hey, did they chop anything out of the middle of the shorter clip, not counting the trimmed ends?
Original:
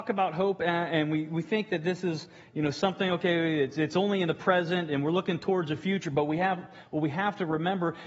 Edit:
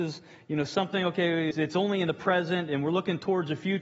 yes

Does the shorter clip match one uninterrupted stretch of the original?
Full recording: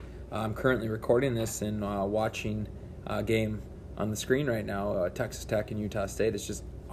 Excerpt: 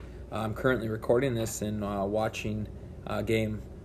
yes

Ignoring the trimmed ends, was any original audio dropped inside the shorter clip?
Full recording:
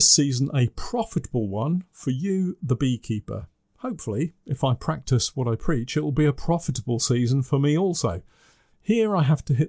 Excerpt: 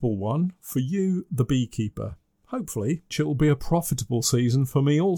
yes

